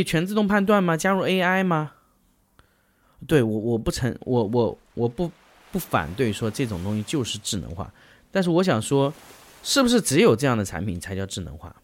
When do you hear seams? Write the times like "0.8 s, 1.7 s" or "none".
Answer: none